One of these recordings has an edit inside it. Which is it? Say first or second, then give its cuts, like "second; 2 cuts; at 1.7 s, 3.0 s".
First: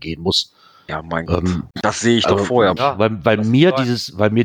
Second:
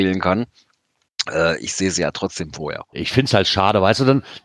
first; 2 cuts; at 1.7 s, 2.8 s